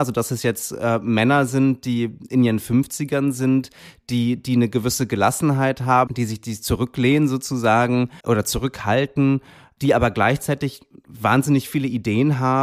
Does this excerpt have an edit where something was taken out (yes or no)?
yes